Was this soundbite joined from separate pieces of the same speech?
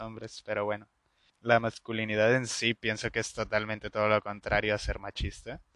yes; 1 cut; at 1.3 s

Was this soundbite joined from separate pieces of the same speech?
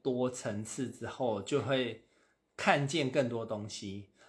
no; 0 cuts

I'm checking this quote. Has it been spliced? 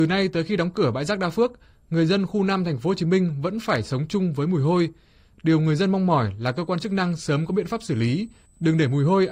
no; 0 cuts

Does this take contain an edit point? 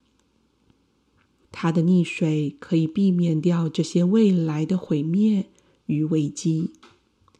yes; 1 cut; at 1.4 s

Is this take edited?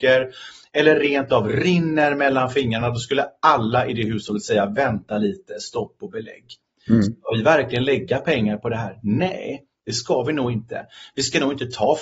no; 0 cuts

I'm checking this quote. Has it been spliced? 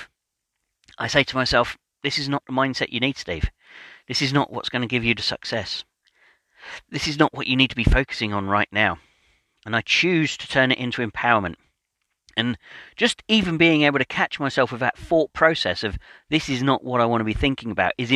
no; 0 cuts

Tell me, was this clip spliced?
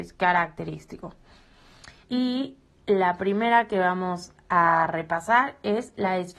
yes; 1 cut; at 2.0 s

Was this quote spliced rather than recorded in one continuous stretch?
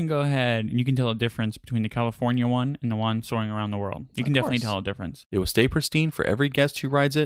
yes; 1 cut; at 5.2 s

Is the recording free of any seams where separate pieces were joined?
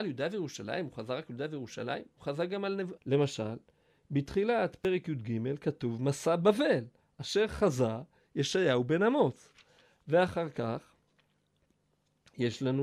no; 1 cut; at 3.0 s

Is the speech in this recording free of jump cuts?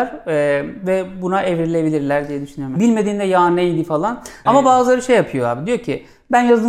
no; 2 cuts; at 2.8 s, 4.5 s

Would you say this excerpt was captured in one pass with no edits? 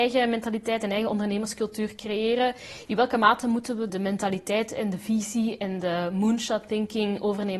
no; 1 cut; at 3.9 s

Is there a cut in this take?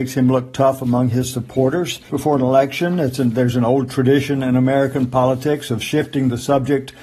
yes; 1 cut; at 2.1 s

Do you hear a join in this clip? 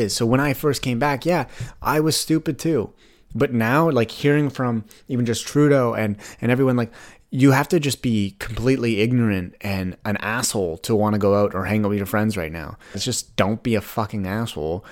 yes; 1 cut; at 12.9 s

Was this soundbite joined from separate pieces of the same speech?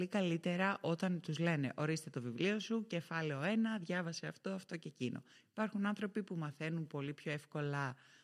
no; 0 cuts

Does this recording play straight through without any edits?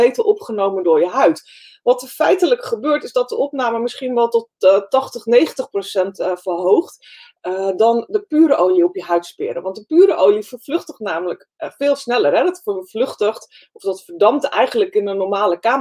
yes; 0 cuts

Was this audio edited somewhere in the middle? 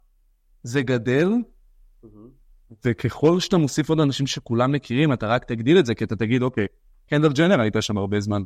no; 0 cuts

